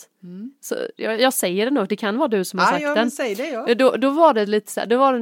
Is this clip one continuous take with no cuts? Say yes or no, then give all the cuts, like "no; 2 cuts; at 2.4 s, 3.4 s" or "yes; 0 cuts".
yes; 0 cuts